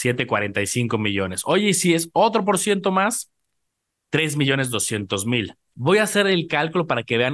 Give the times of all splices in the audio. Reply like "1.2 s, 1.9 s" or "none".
5.7 s